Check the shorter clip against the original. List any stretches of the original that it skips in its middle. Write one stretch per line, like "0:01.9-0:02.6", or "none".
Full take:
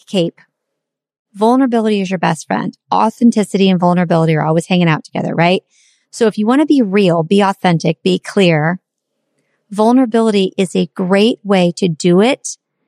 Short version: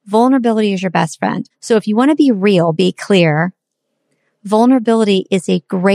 0:02.8-0:06.0
0:07.2-0:08.0